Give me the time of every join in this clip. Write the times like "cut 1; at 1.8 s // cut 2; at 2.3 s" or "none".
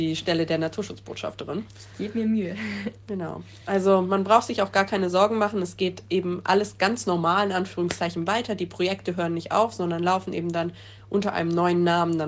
none